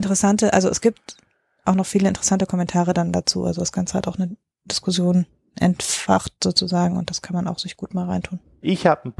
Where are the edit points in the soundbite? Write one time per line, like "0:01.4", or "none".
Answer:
none

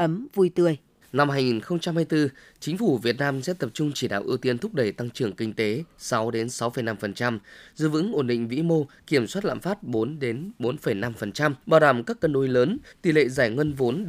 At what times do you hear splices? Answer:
0:01.0
0:11.6
0:12.9

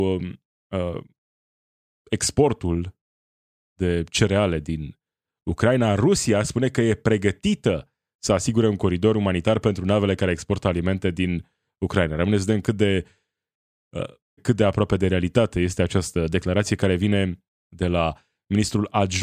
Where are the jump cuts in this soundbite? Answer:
0:14.4

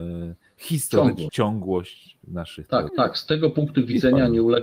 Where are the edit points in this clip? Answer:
0:01.3
0:02.9

